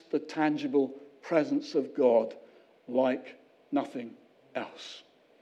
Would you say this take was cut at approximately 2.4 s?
no; 0 cuts

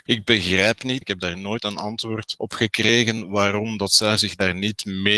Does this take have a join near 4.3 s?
no; 1 cut; at 1.0 s

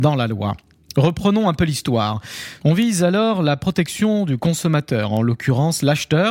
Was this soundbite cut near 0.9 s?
no; 1 cut; at 2.6 s

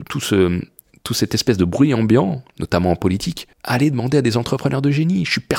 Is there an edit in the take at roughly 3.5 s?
yes; 1 cut; at 3.5 s

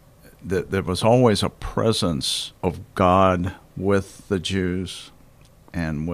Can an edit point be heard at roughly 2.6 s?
yes; 1 cut; at 2.6 s

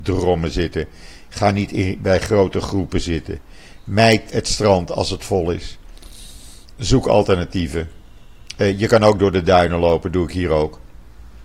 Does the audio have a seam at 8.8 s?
no; 1 cut; at 4.3 s

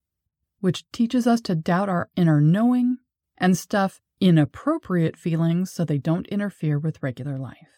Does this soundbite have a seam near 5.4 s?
no; 1 cut; at 3.2 s

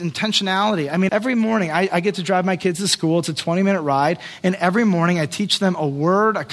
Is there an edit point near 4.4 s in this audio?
no; 1 cut; at 1.1 s

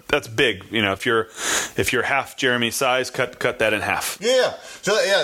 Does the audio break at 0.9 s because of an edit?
no; 0 cuts

